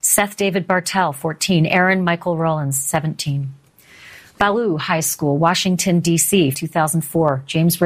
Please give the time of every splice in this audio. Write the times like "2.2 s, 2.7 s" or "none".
6.5 s

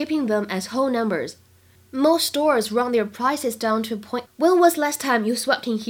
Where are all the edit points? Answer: 4.3 s

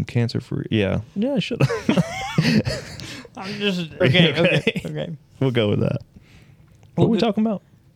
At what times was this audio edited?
4.0 s

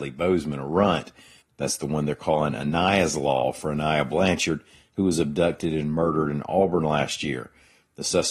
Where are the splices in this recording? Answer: 1.4 s

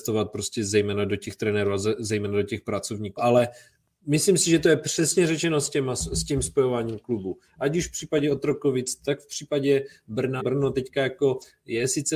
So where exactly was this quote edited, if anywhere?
3.2 s, 10.4 s

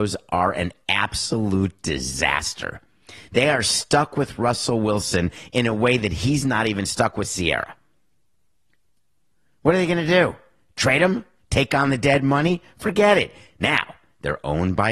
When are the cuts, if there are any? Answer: 11.4 s

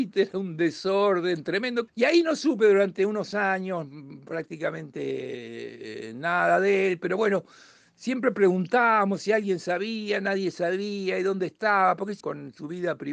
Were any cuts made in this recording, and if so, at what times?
1.9 s, 12.2 s

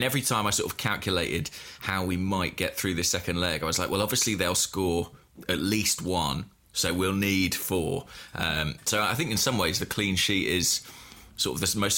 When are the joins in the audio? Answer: none

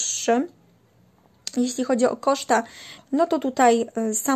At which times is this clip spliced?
3.0 s

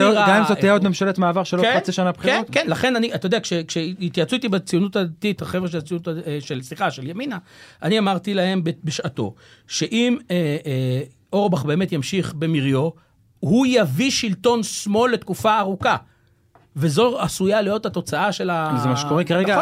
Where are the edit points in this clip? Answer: none

